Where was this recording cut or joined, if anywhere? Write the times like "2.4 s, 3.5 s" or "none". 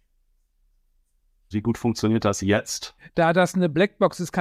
1.5 s, 3.0 s